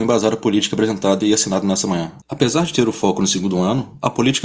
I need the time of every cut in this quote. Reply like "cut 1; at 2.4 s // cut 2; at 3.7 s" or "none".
cut 1; at 2.2 s